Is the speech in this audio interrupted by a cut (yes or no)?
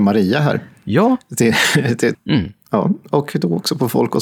yes